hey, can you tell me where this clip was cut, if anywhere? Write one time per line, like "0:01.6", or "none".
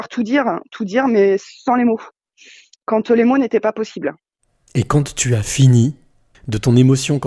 0:06.3